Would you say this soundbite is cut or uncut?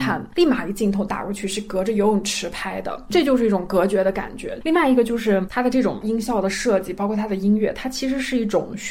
uncut